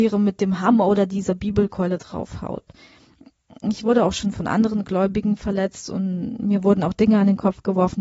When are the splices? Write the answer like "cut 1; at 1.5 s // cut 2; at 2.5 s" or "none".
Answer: none